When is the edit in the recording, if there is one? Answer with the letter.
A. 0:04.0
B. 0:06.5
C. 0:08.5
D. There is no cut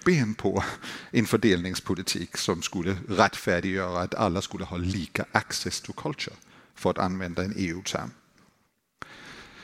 D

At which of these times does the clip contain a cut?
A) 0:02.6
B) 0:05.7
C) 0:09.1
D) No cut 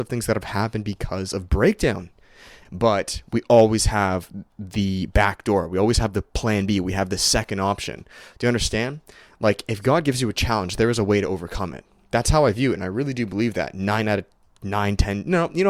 A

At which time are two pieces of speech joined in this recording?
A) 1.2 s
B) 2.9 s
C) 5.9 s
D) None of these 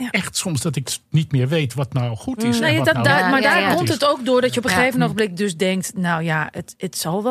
D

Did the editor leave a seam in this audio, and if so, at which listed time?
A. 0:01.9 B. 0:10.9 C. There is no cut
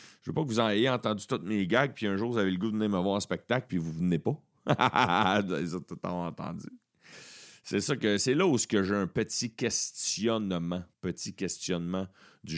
B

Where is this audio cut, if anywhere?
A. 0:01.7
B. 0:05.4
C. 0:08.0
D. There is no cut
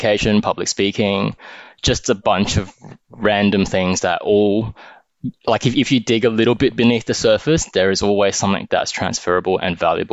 D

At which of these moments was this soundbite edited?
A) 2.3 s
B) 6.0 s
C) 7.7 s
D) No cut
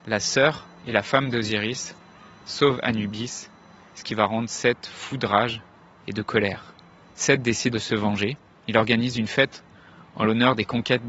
C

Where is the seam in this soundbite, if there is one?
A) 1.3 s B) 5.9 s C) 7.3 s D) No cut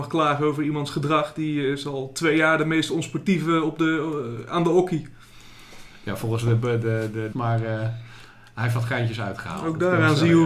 C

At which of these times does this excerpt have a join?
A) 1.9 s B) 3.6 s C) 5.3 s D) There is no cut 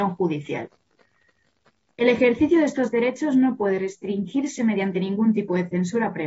A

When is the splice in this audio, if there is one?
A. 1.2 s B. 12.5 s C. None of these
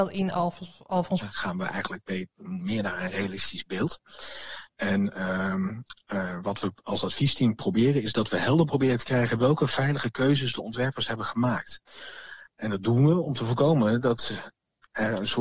A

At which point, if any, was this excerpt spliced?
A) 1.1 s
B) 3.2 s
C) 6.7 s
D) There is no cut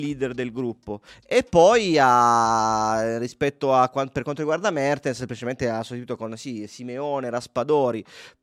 A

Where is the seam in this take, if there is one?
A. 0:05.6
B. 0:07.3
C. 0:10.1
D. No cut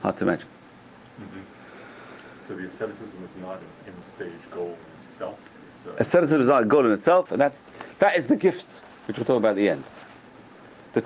B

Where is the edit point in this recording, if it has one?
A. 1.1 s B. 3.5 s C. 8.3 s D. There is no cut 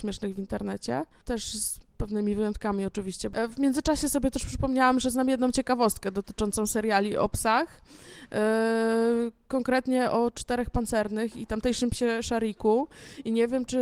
D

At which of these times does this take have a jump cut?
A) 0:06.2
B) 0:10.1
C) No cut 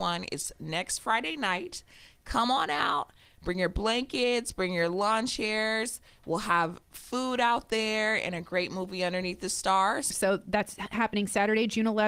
B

